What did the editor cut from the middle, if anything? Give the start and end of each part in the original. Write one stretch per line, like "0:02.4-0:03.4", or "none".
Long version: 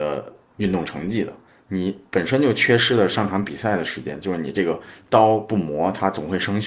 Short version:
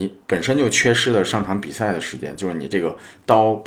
none